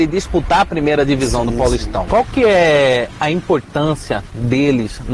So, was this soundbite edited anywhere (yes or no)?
yes